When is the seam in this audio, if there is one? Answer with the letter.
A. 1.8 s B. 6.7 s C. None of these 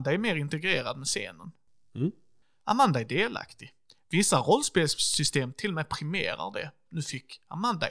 C